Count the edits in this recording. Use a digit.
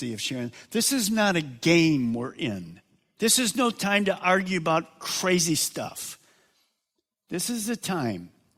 0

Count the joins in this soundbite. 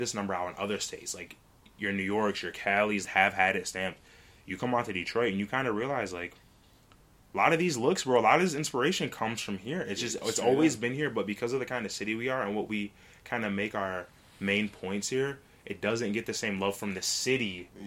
1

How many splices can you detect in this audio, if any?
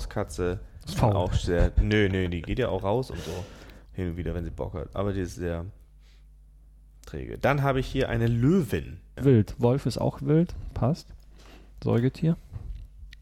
1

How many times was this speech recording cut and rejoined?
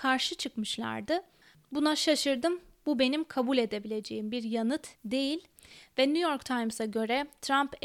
2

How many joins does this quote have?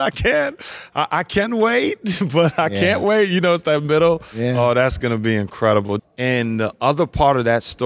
1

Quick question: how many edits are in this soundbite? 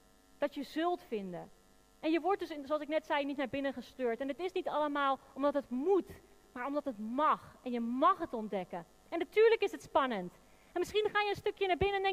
0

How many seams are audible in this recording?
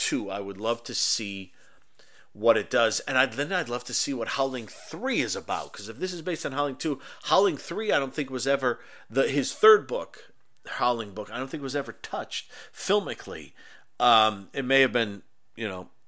0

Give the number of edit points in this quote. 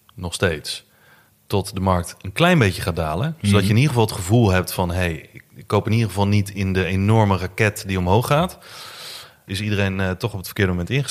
1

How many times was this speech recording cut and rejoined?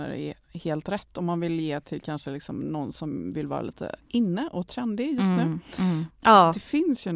1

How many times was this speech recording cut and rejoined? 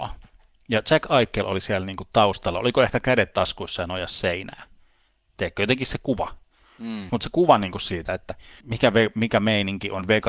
2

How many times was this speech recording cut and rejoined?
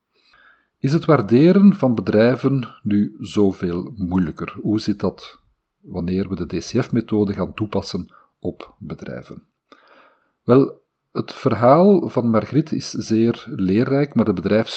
0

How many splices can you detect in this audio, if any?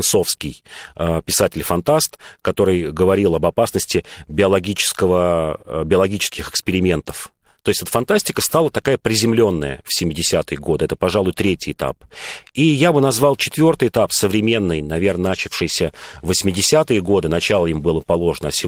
0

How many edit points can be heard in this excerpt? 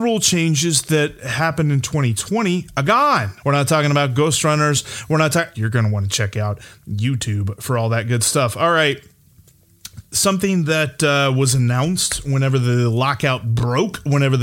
2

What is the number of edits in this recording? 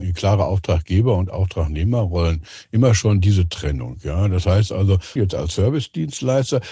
1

